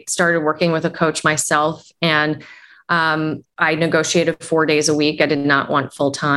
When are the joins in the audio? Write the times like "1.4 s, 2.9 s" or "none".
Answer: 3.4 s